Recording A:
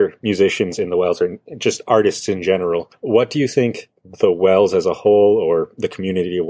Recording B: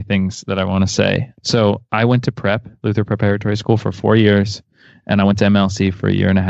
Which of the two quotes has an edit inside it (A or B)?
B